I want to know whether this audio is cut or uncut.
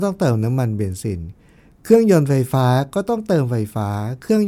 uncut